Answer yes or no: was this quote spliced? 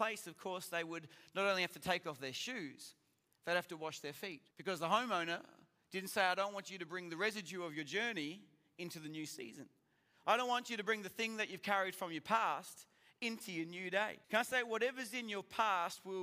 yes